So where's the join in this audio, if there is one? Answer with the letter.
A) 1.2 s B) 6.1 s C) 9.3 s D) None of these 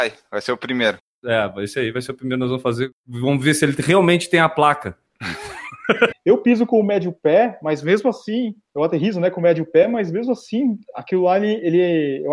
B